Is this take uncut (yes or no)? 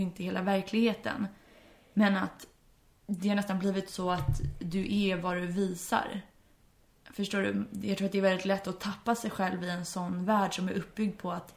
yes